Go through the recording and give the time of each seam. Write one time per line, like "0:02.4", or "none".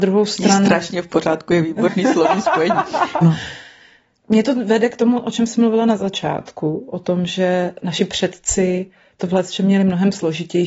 0:03.2